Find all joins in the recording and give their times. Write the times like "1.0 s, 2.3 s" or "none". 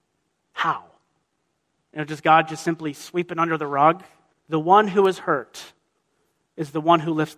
4.3 s